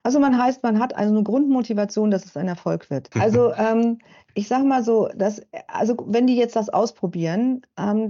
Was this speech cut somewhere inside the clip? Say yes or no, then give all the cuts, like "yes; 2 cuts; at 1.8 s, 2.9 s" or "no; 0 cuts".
yes; 1 cut; at 3.1 s